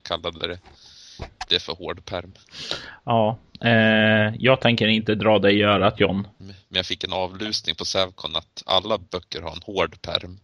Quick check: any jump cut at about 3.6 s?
no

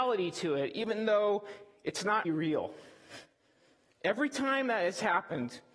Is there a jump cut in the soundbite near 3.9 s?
no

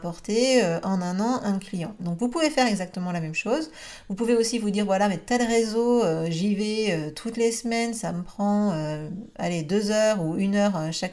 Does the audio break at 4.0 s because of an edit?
no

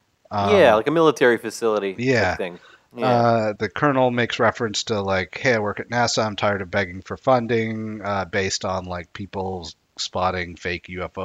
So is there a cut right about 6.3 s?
no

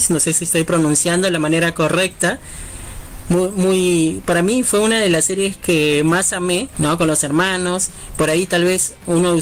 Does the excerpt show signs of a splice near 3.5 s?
no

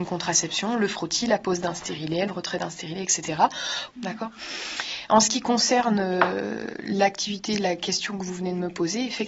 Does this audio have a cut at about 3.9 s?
yes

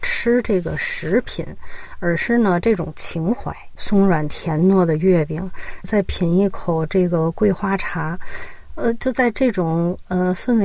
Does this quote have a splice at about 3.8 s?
yes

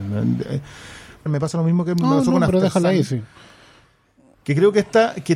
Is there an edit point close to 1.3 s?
yes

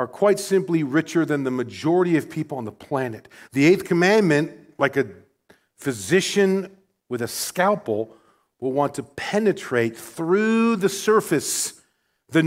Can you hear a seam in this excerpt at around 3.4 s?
yes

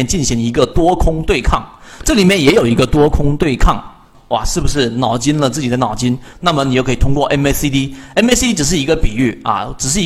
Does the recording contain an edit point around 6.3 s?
yes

